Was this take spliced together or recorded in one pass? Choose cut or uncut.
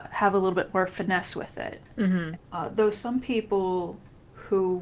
cut